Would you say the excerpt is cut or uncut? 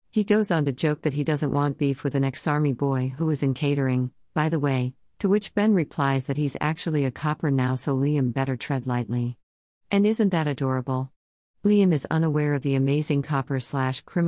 uncut